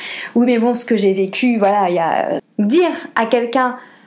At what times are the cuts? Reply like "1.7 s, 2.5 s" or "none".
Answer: 2.4 s